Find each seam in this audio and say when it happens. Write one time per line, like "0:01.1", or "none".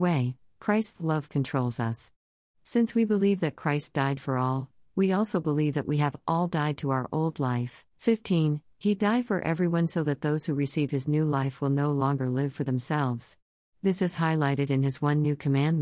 0:07.9
0:13.7